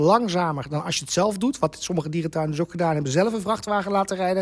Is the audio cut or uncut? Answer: uncut